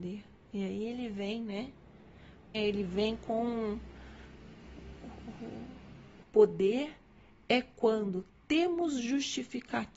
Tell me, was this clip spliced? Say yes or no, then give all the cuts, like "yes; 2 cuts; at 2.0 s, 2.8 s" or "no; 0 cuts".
yes; 2 cuts; at 2.5 s, 6.2 s